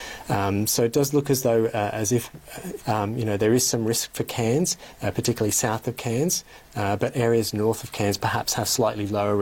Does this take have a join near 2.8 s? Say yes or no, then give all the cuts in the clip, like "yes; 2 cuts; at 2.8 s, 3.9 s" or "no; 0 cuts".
yes; 1 cut; at 2.8 s